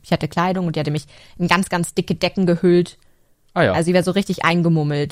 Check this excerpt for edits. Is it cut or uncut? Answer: uncut